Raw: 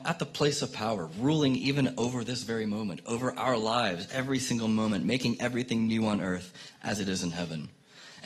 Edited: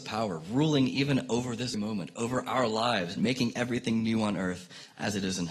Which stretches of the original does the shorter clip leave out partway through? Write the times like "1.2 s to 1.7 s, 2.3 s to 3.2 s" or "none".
2.4 s to 2.6 s, 4.1 s to 5.0 s